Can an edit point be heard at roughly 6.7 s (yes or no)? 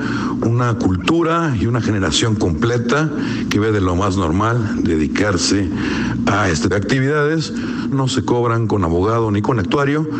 yes